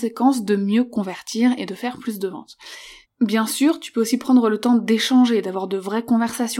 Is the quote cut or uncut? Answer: cut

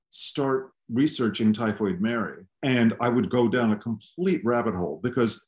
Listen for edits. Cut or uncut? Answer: cut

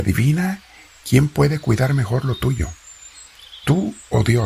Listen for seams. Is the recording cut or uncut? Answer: uncut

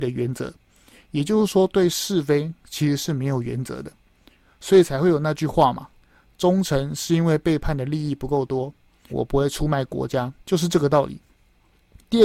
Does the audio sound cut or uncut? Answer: cut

